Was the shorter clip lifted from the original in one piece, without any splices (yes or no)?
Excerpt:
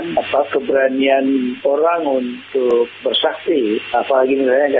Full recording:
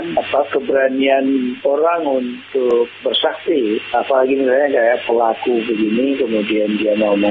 yes